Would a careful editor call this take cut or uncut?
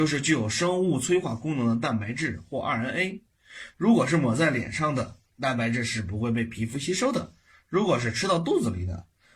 uncut